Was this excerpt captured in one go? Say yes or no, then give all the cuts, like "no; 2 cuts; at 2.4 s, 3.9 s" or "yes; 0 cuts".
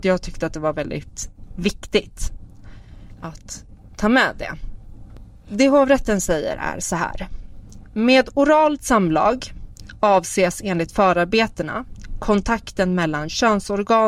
yes; 0 cuts